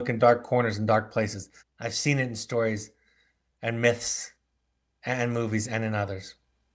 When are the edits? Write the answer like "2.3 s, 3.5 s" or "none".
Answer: 1.6 s